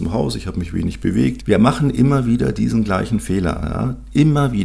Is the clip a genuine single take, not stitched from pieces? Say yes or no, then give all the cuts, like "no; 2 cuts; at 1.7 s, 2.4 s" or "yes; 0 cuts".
no; 1 cut; at 1.4 s